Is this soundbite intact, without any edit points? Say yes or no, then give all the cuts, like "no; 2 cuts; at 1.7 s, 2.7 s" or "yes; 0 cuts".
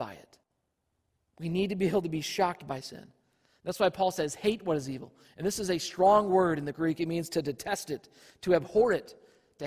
yes; 0 cuts